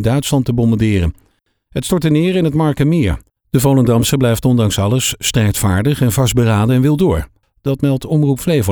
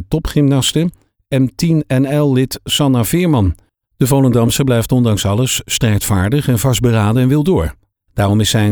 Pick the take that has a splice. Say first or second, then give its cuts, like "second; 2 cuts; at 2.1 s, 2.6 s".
first; 2 cuts; at 3.3 s, 7.4 s